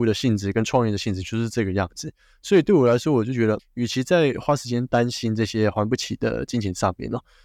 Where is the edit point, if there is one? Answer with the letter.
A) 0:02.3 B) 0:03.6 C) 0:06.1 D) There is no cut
B